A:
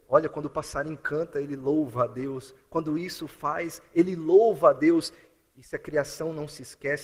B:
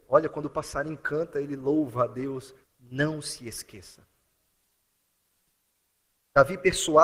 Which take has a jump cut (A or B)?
B